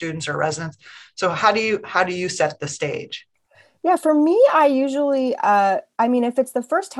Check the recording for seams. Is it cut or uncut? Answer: uncut